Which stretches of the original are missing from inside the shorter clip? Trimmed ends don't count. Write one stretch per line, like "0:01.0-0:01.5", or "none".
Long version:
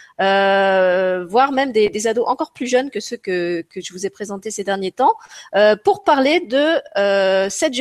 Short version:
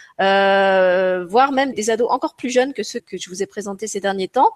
0:01.7-0:01.9
0:03.2-0:03.6